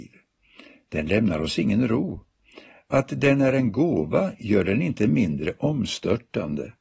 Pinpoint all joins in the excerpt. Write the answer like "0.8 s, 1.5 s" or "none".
none